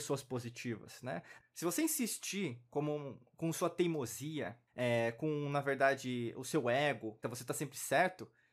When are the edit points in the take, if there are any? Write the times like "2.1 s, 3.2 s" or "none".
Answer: 1.4 s, 4.7 s, 7.2 s